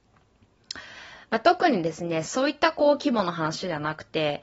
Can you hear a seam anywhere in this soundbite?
yes; 1 cut; at 2.2 s

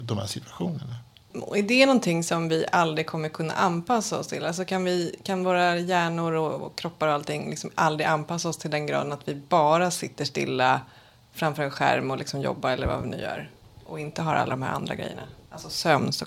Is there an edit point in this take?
no; 0 cuts

